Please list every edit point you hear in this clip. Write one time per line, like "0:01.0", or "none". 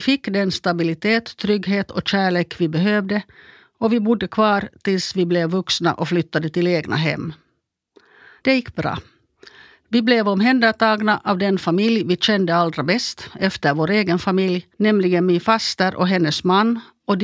0:08.4
0:14.7